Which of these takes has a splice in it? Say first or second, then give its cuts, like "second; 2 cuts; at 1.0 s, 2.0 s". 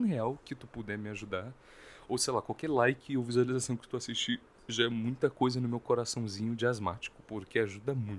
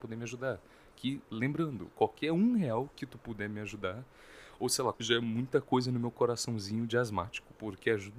second; 1 cut; at 4.9 s